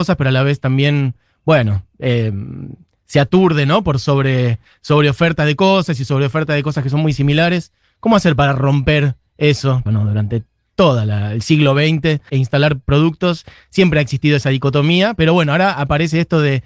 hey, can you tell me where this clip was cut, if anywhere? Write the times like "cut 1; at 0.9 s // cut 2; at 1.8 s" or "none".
cut 1; at 9.9 s // cut 2; at 12.3 s